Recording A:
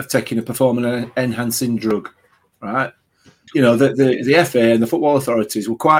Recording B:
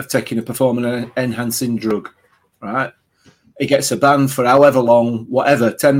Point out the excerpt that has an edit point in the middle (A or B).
A